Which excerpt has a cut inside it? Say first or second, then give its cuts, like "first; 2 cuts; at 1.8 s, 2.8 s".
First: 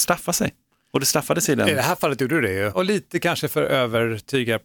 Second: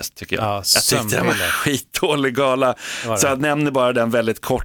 first; 1 cut; at 2.7 s